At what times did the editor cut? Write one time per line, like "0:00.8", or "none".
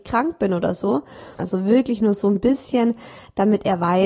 0:01.4